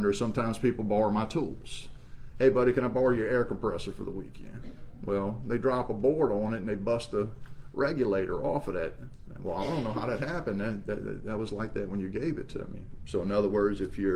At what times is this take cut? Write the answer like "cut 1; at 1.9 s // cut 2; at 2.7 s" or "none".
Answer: cut 1; at 13.0 s